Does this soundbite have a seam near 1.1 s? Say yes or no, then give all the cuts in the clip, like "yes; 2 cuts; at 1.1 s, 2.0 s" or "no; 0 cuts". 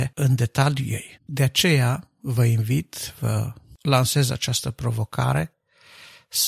yes; 1 cut; at 1.1 s